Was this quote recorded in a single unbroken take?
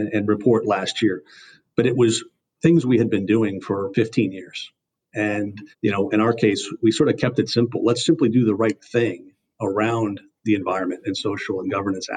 no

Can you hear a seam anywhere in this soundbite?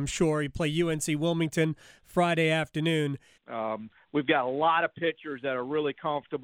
yes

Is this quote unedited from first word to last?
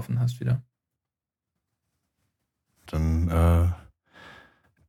no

